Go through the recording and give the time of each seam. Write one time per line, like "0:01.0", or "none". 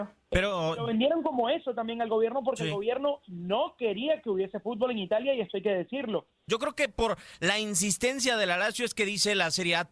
0:06.5